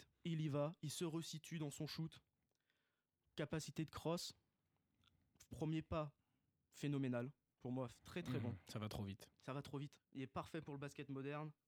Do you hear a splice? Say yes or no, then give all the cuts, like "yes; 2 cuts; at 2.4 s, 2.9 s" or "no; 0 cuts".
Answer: yes; 1 cut; at 10.0 s